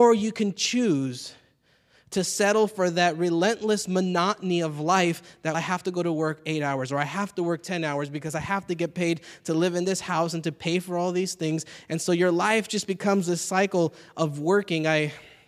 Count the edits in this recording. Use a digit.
1